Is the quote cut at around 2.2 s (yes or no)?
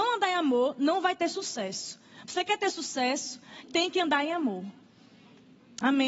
no